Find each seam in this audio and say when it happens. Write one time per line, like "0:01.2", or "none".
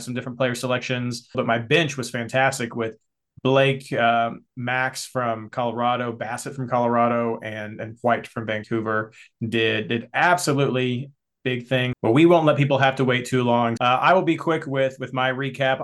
0:01.3
0:11.9
0:13.8